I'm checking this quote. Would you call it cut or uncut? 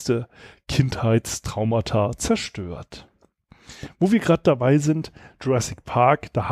uncut